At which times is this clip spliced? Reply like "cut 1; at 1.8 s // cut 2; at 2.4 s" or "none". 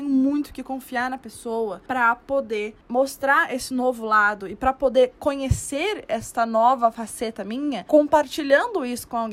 cut 1; at 2.8 s